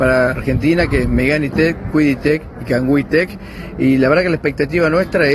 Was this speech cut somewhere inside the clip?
no; 0 cuts

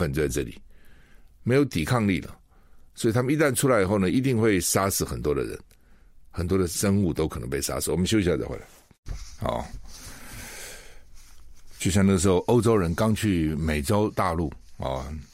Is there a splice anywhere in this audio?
yes; 1 cut; at 9.4 s

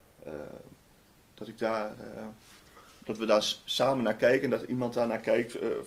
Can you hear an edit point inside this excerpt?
no; 0 cuts

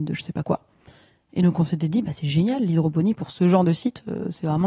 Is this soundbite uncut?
yes; 0 cuts

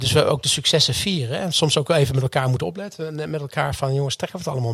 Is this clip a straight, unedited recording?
yes; 0 cuts

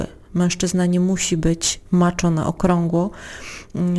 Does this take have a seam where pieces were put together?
no; 0 cuts

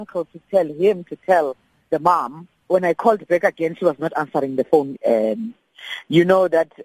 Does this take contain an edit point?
yes; 2 cuts; at 2.6 s, 4.9 s

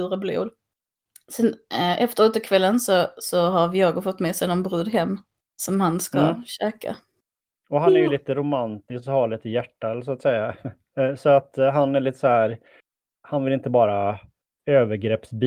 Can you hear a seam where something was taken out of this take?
no; 0 cuts

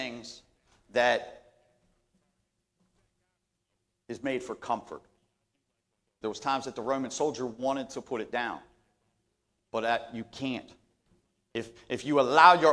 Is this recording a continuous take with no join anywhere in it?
no; 1 cut; at 6.2 s

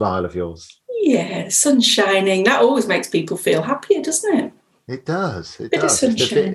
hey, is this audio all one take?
yes; 0 cuts

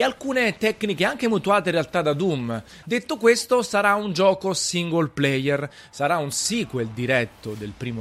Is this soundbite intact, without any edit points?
no; 1 cut; at 2.8 s

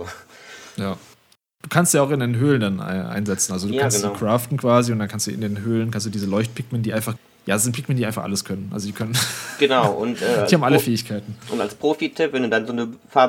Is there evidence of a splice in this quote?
no; 0 cuts

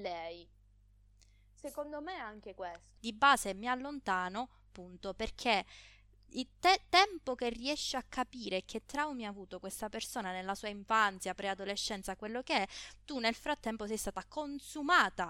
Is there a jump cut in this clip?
yes; 1 cut; at 3.0 s

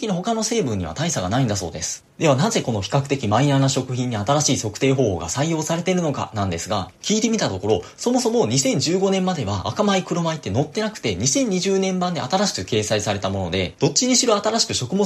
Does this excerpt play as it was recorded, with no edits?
no; 1 cut; at 2.1 s

